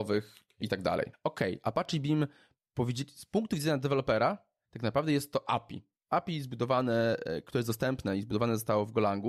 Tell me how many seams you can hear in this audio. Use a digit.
1